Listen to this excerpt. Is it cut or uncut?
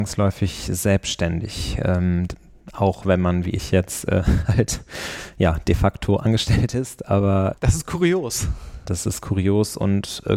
cut